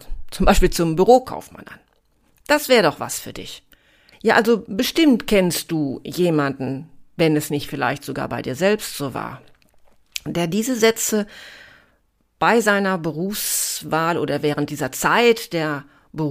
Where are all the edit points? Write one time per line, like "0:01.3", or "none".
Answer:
0:04.1